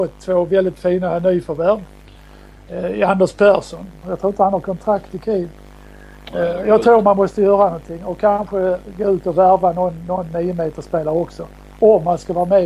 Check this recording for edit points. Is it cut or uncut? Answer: cut